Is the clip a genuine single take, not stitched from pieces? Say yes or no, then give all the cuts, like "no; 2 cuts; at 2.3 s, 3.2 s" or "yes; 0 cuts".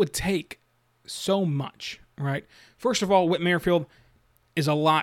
yes; 0 cuts